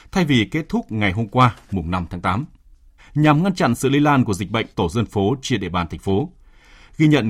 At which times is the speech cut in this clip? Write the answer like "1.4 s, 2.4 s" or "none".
3.0 s, 4.7 s